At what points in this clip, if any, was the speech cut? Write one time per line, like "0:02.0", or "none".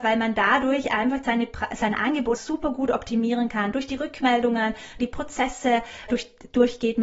0:02.4
0:05.0
0:06.1